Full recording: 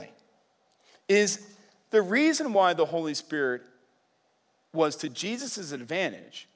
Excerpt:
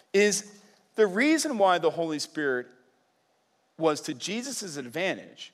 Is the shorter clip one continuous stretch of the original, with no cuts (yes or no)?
yes